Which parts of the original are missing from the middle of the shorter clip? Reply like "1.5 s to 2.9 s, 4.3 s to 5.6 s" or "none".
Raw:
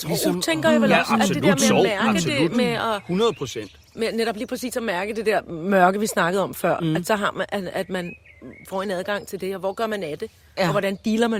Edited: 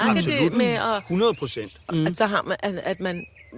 3.9 s to 6.8 s